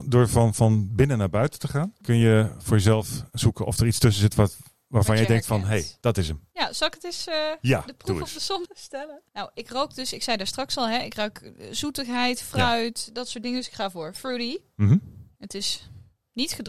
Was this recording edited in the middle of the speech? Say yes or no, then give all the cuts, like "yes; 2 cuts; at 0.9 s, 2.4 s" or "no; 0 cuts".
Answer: no; 0 cuts